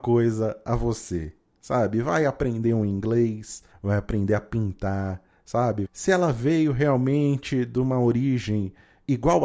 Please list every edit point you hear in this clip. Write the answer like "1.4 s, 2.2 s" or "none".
3.7 s, 5.9 s